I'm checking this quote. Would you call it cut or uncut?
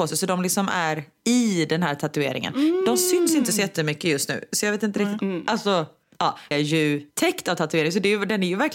cut